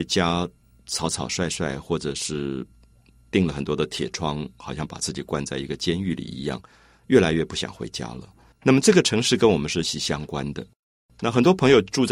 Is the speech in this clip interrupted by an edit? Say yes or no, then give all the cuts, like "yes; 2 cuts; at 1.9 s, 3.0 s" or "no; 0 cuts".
yes; 2 cuts; at 8.5 s, 9.8 s